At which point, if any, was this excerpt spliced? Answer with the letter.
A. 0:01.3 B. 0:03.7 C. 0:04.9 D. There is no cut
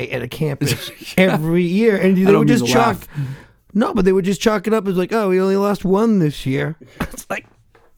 D